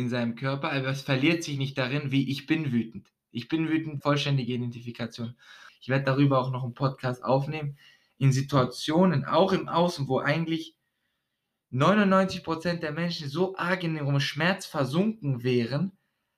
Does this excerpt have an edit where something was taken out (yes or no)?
yes